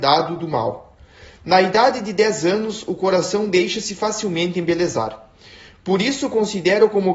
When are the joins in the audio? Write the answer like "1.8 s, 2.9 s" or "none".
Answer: none